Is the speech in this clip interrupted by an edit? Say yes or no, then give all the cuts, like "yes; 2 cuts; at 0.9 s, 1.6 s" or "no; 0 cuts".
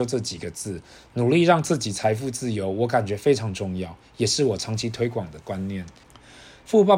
yes; 1 cut; at 6.0 s